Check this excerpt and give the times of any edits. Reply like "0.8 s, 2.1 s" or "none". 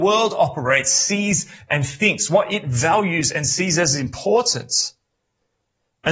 none